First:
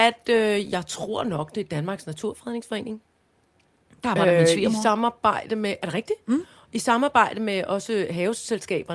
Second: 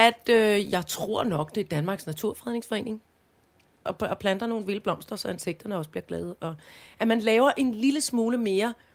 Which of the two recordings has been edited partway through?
second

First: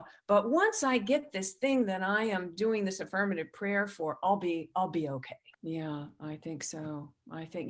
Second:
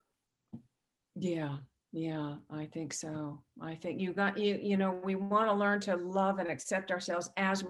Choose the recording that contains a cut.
first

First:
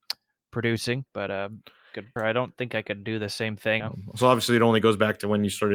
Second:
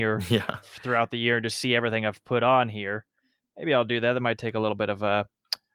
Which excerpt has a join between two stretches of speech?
first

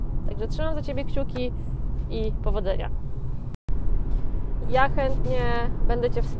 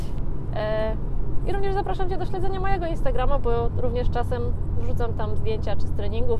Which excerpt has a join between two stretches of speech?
first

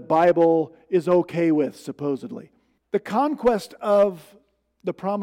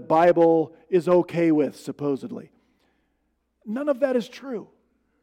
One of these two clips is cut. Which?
first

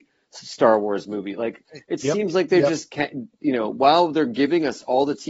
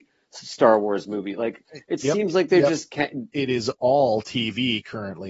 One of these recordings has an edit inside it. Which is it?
second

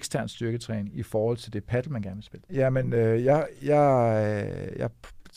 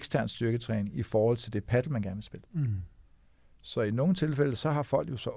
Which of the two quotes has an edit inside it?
first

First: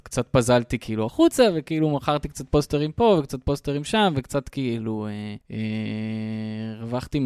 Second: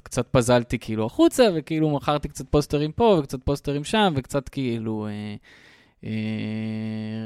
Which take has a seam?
first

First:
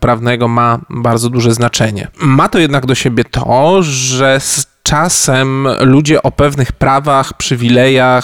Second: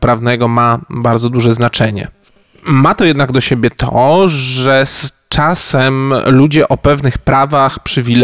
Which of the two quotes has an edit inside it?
first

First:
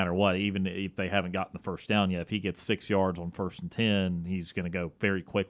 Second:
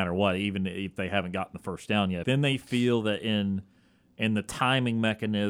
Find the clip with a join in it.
second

